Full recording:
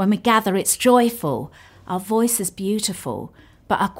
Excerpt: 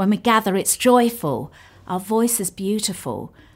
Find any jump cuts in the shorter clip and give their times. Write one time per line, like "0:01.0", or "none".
none